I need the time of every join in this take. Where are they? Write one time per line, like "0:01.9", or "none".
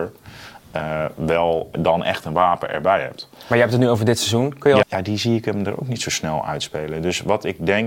0:01.7
0:04.8